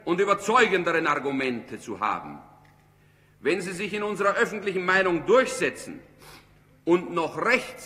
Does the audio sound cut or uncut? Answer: uncut